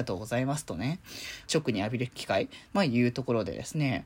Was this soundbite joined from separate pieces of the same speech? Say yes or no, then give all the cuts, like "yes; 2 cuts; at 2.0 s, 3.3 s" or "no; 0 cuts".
yes; 2 cuts; at 1.5 s, 2.7 s